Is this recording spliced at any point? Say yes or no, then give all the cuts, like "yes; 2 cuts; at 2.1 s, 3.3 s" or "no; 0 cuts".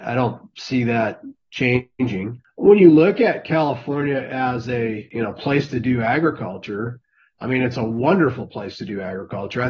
no; 0 cuts